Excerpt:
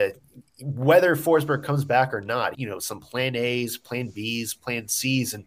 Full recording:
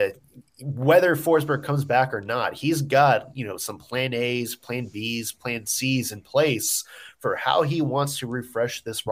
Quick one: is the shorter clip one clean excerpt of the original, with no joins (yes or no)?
no